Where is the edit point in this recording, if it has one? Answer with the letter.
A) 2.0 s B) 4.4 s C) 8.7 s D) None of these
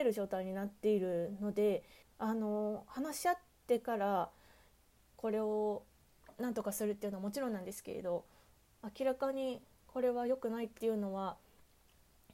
A